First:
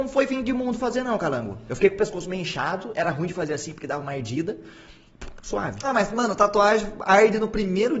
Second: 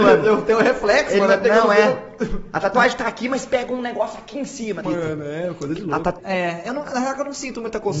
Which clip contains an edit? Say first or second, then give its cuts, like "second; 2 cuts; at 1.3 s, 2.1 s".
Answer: second; 2 cuts; at 4.8 s, 6.2 s